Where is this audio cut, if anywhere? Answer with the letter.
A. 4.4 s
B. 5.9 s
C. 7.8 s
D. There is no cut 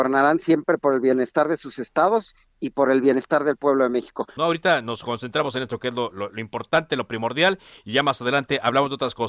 A